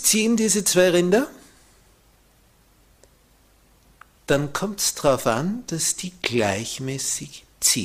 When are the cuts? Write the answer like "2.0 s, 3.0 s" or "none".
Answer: none